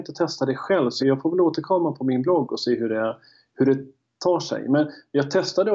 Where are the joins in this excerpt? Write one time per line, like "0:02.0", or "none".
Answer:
0:01.0